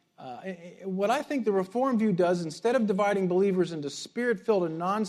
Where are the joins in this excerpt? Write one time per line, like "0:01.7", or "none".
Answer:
none